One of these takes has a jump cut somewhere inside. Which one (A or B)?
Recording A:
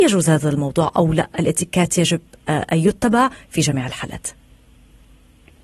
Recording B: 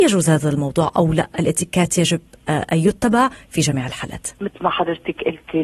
B